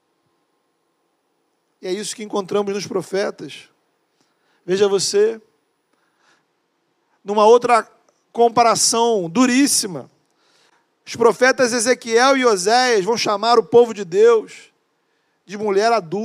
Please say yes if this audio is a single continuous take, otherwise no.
yes